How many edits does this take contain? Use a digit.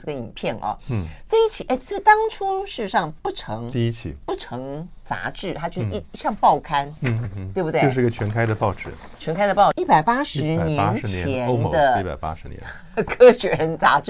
2